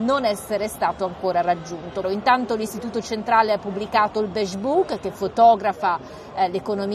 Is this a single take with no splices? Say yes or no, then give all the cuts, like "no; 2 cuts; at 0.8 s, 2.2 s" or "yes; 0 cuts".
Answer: no; 1 cut; at 2.0 s